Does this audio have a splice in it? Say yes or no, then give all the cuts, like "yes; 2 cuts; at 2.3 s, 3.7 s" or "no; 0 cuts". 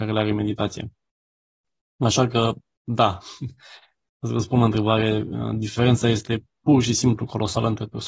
no; 0 cuts